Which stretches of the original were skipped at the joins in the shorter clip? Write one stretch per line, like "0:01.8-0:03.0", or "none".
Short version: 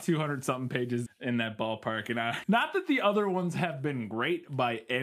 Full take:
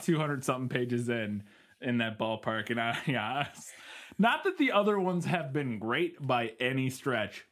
0:01.1-0:01.7
0:03.0-0:04.1